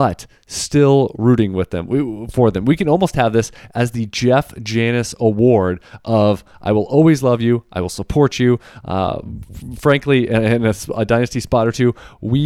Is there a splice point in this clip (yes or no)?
no